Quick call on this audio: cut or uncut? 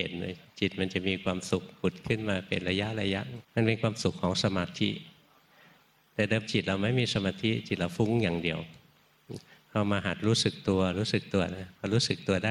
cut